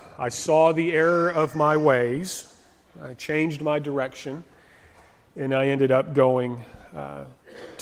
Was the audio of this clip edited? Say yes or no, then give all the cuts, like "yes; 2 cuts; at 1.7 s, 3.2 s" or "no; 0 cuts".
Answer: no; 0 cuts